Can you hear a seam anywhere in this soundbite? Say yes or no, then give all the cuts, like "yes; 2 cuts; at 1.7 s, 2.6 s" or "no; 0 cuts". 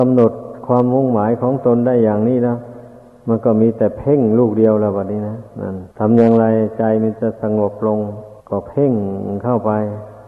yes; 2 cuts; at 5.9 s, 8.4 s